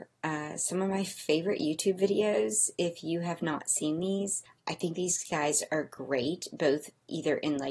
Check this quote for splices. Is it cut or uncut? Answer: uncut